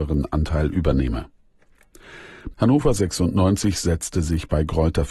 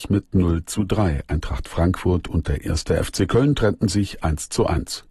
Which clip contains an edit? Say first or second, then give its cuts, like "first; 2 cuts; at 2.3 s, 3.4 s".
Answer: first; 1 cut; at 2.5 s